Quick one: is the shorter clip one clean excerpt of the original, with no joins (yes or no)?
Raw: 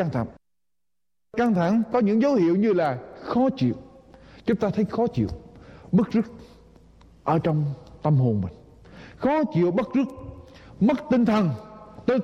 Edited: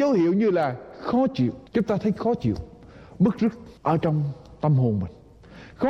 no